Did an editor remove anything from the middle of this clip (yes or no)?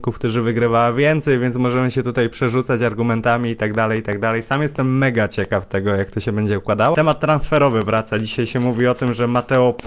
yes